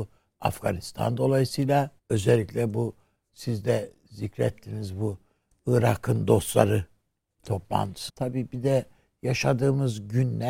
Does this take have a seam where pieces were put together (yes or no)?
yes